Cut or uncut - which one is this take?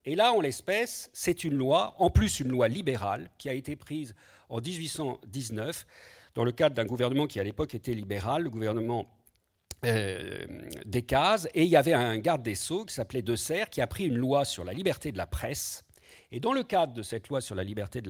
uncut